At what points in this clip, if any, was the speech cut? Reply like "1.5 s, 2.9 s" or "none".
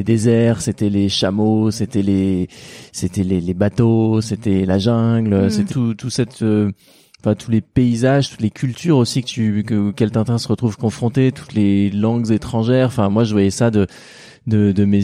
5.7 s, 7.4 s